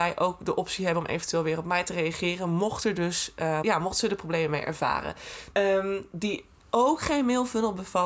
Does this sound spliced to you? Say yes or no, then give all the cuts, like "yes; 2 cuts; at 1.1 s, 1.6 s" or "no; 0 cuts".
yes; 2 cuts; at 3.6 s, 5.5 s